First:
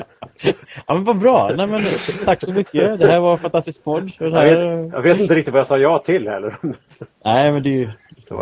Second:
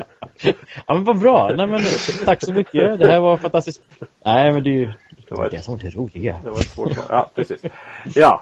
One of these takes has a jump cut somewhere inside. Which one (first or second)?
second